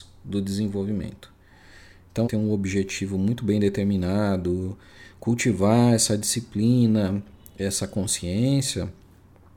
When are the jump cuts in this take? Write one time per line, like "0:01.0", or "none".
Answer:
0:02.2